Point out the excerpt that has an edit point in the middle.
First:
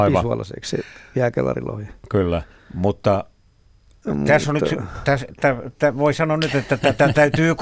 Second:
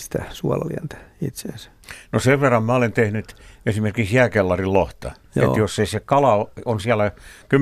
first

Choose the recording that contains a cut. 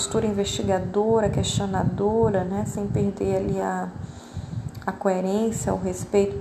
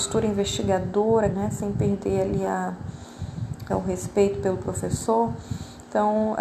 second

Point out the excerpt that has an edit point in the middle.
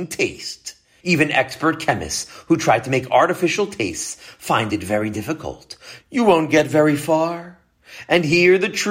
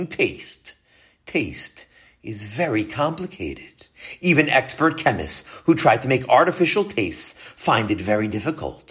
first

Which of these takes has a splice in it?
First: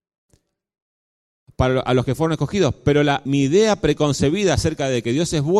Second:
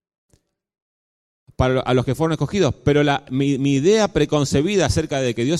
first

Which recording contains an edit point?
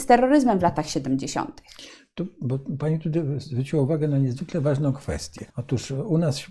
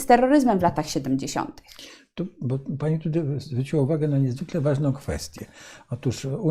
first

